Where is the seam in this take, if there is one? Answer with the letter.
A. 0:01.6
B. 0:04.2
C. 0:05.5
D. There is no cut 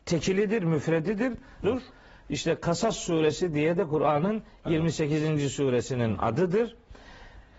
A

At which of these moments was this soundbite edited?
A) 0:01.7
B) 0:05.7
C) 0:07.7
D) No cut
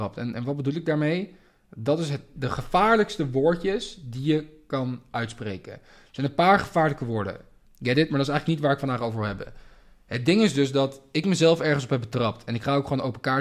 C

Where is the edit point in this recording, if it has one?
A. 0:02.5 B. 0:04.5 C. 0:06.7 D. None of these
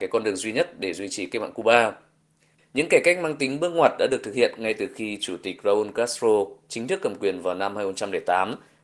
A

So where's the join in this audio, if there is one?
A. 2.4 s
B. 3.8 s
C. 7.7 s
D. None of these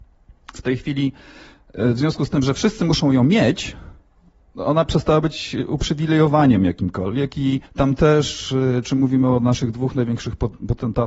C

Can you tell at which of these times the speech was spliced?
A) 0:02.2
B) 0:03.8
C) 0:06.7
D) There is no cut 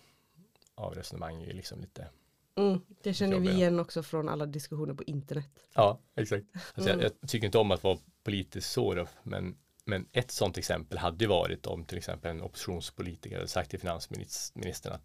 C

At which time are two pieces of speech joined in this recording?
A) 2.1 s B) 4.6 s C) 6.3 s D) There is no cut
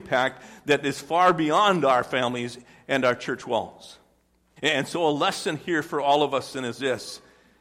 B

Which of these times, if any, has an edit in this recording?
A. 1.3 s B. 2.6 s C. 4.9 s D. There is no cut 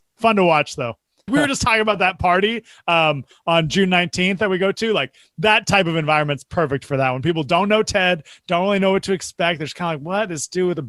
A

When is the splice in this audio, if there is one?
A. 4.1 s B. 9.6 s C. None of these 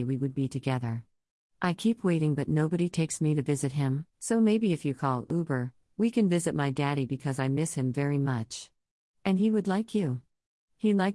A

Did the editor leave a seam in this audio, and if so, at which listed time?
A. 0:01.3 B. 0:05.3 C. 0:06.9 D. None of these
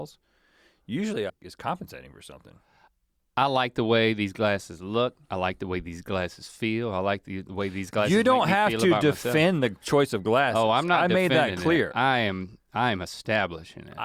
A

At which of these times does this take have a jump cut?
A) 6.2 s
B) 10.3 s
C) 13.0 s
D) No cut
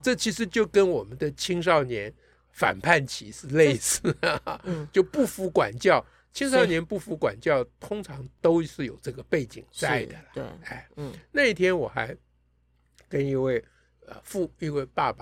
D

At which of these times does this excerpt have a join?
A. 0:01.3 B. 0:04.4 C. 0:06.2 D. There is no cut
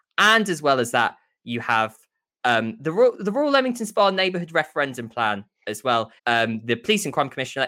C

